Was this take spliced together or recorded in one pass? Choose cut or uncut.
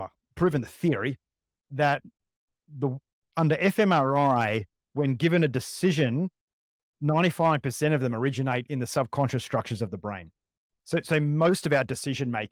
uncut